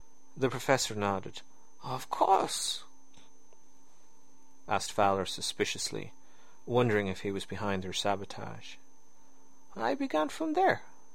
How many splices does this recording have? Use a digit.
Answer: 2